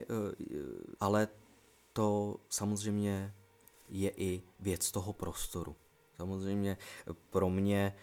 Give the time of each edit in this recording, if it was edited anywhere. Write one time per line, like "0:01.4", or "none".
0:01.0